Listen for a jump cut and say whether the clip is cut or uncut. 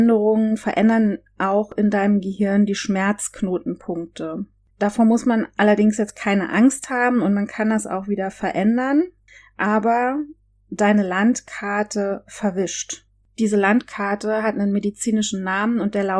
uncut